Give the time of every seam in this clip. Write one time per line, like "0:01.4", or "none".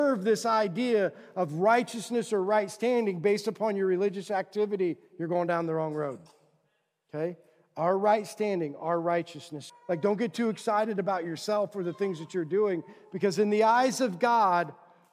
0:09.7